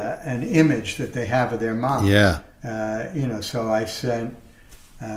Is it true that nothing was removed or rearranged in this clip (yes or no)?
yes